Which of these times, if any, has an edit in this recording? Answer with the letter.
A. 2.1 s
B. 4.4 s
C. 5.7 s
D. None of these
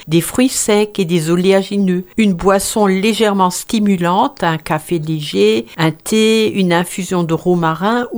D